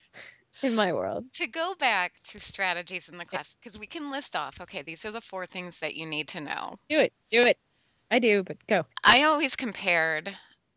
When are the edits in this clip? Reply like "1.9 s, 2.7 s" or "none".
6.9 s, 8.9 s